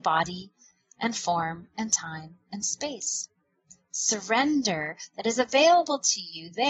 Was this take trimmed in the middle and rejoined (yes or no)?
no